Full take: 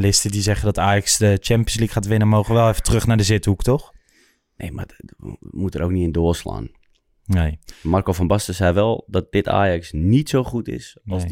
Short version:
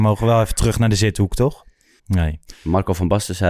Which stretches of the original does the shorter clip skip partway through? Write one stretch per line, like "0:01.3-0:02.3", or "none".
0:04.3-0:07.2

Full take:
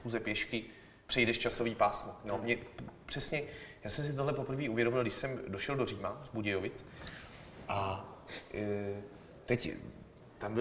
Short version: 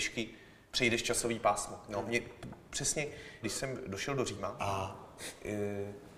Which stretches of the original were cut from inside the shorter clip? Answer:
0:03.8-0:05.0
0:06.2-0:07.7

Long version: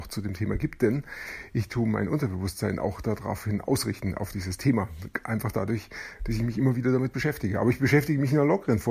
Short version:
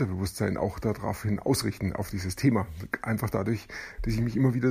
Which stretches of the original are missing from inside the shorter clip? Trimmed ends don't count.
none

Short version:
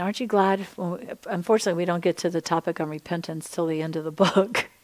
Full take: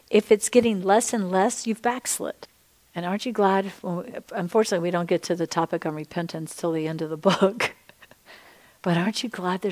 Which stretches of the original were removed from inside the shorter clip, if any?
none

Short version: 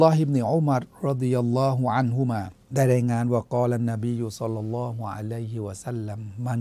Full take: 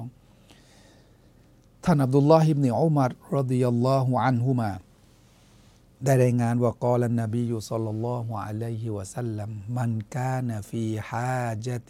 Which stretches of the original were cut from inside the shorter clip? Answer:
0:04.9-0:05.9

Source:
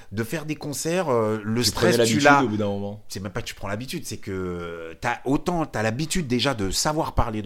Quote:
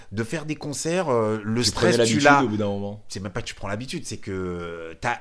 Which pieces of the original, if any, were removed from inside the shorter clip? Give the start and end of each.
none

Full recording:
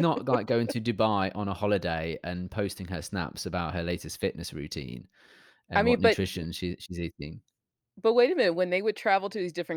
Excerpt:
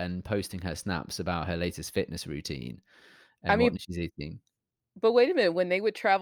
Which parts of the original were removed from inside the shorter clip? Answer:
0:06.0-0:06.8

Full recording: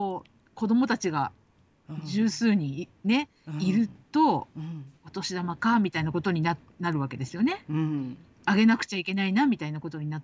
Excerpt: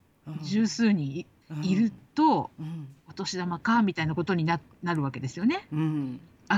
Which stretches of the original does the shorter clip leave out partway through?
0:03.0-0:03.4

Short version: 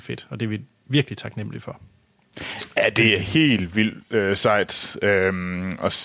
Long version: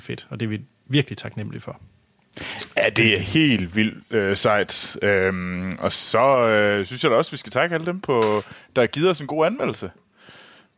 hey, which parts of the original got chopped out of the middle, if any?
none

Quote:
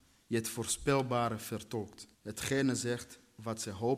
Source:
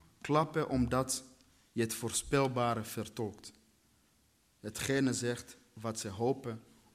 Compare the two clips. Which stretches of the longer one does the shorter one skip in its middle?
0:03.6-0:04.5

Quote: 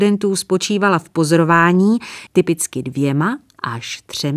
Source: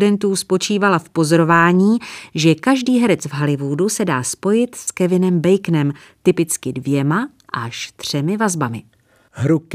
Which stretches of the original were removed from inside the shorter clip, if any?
0:02.3-0:06.2

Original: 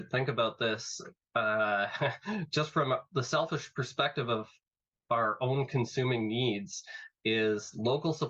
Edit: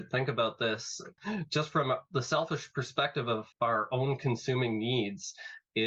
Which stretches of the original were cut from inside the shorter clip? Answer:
0:01.2-0:02.2
0:04.5-0:05.0

